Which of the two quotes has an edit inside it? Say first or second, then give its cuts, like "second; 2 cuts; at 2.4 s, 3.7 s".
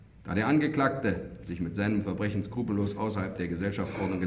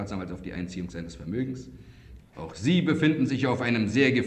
second; 1 cut; at 2.2 s